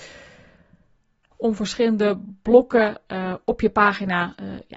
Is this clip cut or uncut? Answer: cut